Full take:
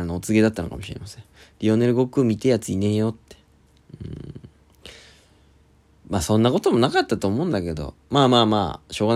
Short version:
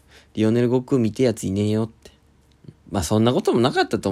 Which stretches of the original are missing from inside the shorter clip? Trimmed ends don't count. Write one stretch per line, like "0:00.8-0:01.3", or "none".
0:04.0-0:05.9

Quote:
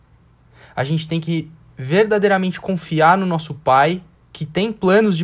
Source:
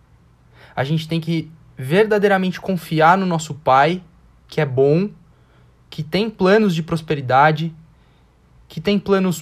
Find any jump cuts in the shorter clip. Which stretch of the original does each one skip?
0:04.1-0:05.7

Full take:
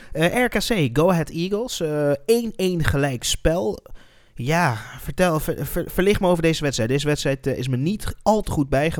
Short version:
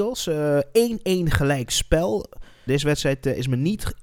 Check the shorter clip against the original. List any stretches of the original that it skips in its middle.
0:04.2-0:06.9

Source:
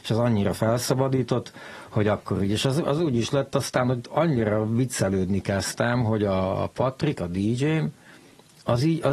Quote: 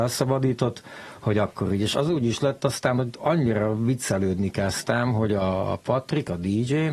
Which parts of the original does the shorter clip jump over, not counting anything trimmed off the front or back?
0:02.6-0:02.8

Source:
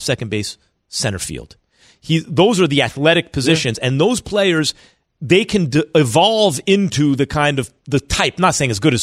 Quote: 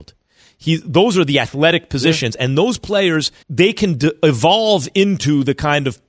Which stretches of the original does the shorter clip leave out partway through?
0:04.8-0:05.1

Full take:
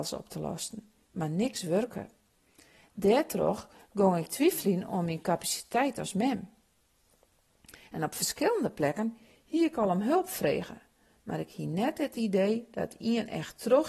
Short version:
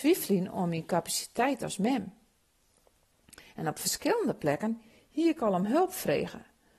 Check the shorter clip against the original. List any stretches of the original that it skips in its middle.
none

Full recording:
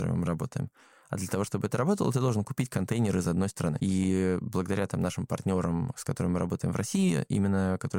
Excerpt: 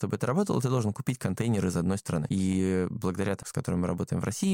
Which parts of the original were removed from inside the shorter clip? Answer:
0:04.9-0:05.9

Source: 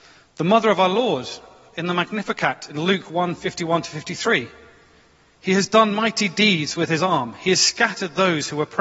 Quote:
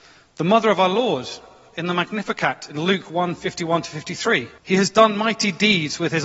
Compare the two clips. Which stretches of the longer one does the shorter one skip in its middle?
0:04.6-0:05.3

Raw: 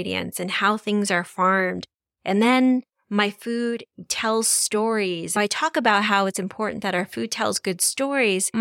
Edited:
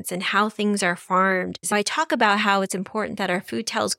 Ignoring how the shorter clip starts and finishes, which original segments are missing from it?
0:01.9-0:05.3

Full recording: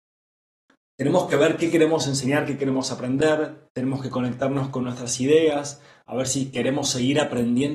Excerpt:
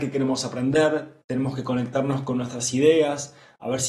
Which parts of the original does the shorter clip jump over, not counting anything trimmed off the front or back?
none

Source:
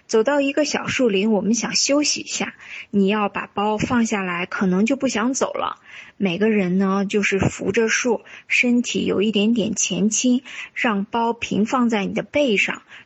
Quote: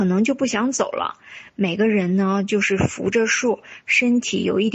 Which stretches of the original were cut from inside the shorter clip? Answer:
none

